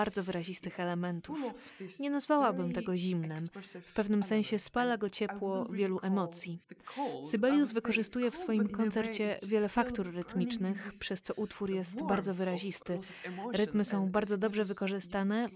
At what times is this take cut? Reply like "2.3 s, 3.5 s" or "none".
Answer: none